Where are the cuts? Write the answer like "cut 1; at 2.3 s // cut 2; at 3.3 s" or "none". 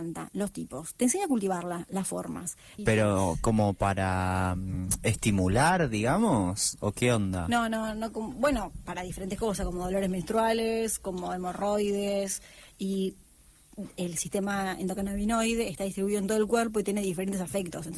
cut 1; at 2.8 s